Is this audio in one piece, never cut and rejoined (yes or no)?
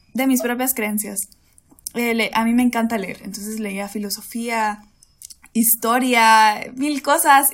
yes